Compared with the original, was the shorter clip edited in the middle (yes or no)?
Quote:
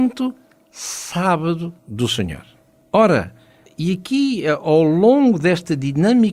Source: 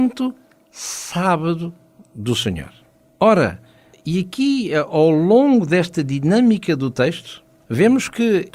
yes